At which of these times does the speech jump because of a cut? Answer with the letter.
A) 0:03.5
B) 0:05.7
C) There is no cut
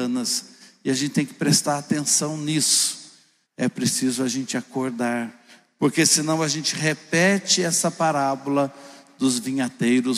A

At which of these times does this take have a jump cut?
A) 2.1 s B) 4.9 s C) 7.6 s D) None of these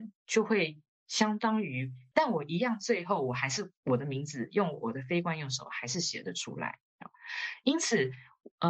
A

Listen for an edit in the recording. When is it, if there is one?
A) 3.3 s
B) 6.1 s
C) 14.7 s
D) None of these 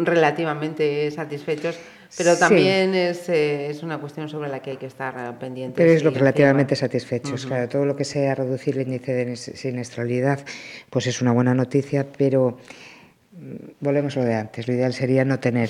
B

